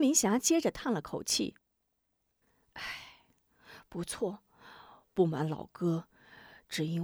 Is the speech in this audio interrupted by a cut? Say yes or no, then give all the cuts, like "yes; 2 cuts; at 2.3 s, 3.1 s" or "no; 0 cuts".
no; 0 cuts